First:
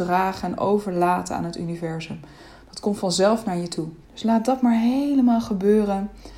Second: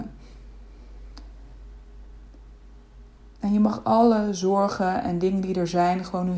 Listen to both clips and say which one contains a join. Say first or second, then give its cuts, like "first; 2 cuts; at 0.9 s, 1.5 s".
first; 1 cut; at 4.0 s